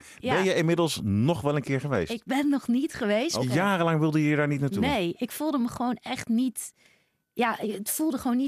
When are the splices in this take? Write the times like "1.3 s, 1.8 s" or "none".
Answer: 3.4 s